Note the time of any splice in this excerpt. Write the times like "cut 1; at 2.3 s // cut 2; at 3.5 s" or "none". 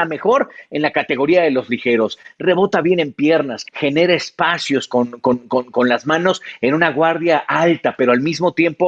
cut 1; at 3.6 s